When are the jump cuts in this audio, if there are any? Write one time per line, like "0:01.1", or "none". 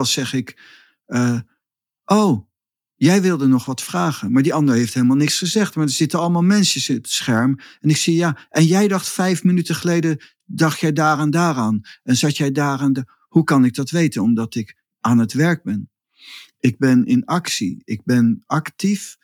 none